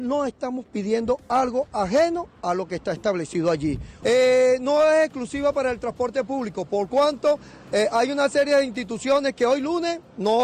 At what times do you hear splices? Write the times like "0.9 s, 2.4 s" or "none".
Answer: 4.0 s

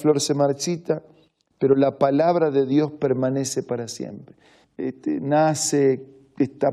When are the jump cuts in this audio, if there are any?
4.6 s

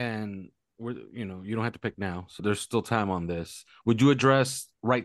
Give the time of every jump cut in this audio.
2.4 s

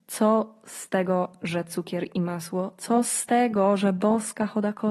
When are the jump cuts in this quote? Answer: none

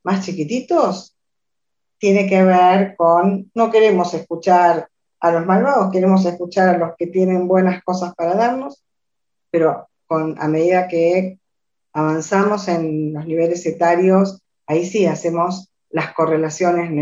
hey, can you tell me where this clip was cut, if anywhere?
none

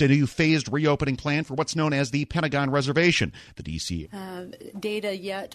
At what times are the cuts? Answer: 4.0 s

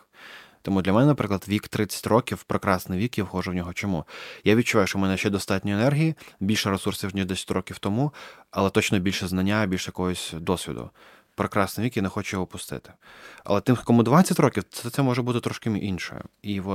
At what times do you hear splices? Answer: none

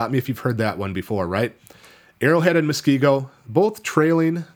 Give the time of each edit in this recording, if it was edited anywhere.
none

